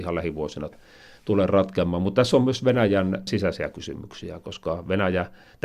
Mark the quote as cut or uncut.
uncut